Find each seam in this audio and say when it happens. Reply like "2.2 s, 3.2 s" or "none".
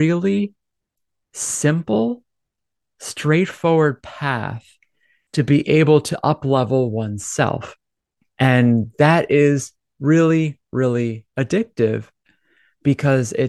8.3 s